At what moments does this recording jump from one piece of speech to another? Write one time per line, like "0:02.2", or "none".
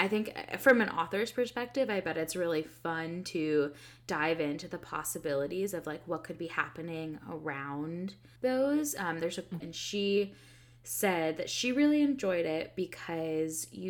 0:08.4
0:09.6